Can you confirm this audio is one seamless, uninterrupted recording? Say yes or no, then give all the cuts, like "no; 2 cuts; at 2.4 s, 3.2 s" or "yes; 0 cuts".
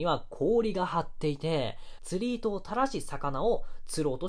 no; 1 cut; at 2.0 s